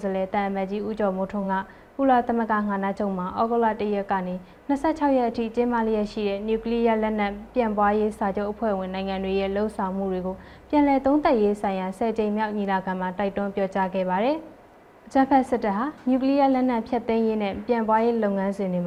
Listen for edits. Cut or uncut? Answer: uncut